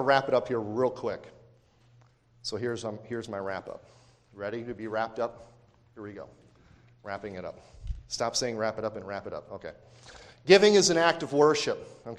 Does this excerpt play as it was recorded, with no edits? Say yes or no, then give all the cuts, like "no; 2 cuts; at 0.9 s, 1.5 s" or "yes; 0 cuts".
yes; 0 cuts